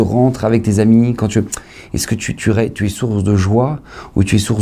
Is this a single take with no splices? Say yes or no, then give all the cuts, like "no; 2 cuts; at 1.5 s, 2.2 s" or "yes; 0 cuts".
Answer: yes; 0 cuts